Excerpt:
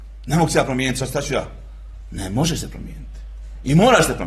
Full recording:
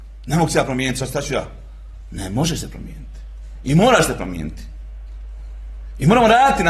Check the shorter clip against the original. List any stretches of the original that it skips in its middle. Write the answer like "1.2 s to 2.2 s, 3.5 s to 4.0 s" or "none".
none

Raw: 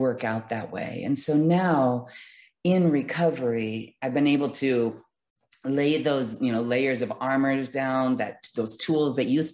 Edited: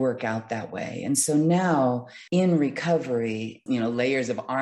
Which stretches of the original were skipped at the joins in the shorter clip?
2.3 s to 2.6 s, 4.0 s to 6.4 s

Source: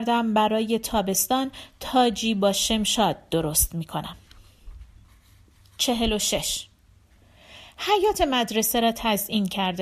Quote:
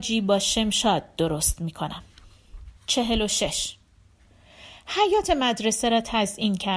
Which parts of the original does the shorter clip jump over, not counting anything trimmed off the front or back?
4.9 s to 5.7 s

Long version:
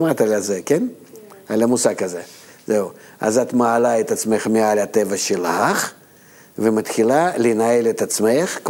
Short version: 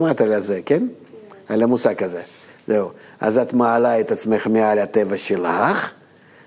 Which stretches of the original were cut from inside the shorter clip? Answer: none

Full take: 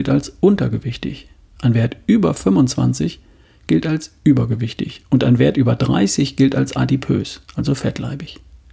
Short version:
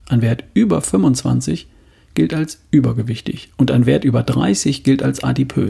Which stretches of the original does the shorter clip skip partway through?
none

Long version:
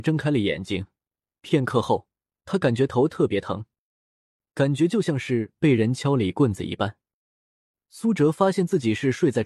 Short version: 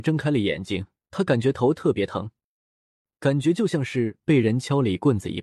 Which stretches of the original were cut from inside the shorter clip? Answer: 1.0 s to 2.3 s

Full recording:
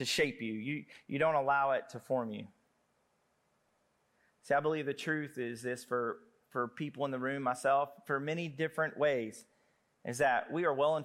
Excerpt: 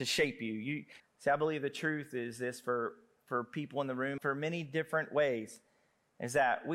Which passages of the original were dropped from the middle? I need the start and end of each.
1.0 s to 4.2 s, 7.4 s to 8.0 s

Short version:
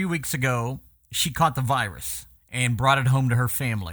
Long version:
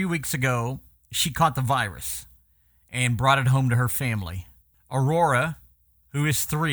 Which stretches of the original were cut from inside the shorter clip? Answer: 2.4 s to 2.8 s

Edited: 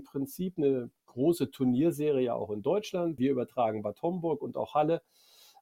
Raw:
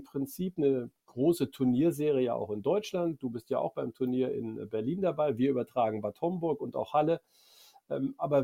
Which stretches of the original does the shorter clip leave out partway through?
3.2 s to 5.4 s

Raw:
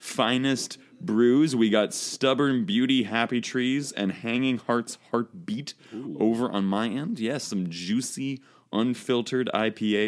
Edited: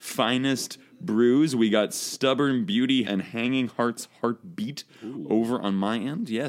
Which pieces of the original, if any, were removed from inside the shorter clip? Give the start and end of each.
3.0 s to 3.9 s

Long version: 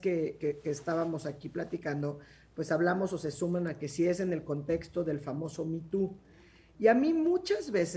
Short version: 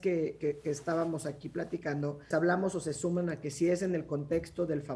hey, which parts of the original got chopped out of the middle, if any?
2.3 s to 2.7 s

